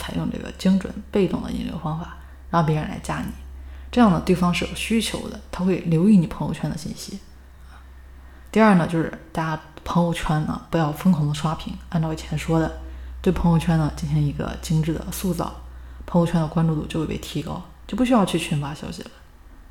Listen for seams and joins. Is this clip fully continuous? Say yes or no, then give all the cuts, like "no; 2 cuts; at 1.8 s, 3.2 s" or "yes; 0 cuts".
yes; 0 cuts